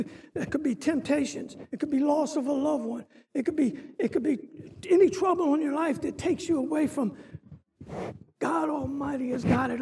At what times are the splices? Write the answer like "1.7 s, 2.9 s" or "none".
1.7 s